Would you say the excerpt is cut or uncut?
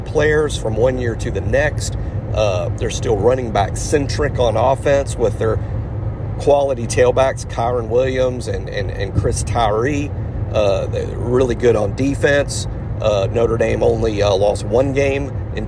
uncut